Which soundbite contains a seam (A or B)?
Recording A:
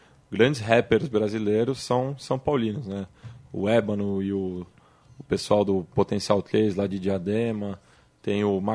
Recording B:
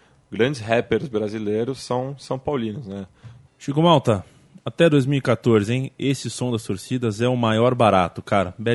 B